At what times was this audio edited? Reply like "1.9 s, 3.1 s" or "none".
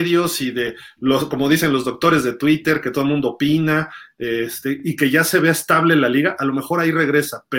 none